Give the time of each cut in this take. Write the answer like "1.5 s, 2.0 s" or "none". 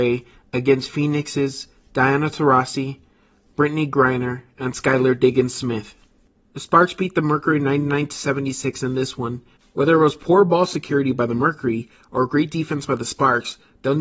9.6 s